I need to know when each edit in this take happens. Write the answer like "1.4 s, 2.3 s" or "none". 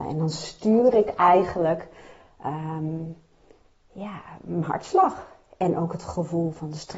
none